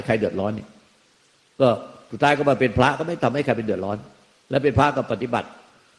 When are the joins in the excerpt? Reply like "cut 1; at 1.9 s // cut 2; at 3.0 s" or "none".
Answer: none